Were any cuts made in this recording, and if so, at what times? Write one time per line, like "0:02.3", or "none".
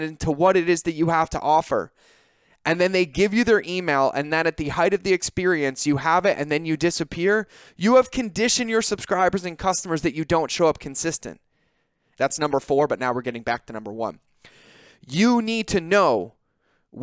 0:12.1